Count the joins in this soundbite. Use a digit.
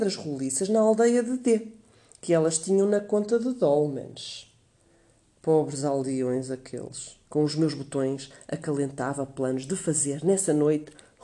1